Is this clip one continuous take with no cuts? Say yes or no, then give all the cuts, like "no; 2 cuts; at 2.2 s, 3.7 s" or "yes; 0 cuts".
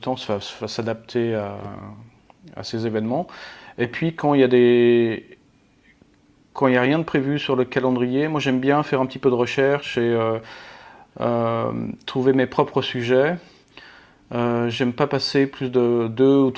yes; 0 cuts